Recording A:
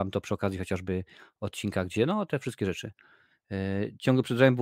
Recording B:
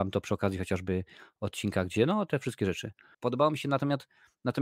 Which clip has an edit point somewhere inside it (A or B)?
B